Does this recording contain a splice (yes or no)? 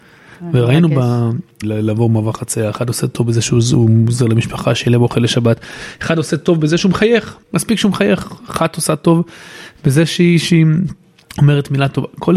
yes